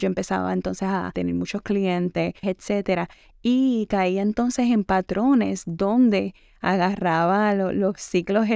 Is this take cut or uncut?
cut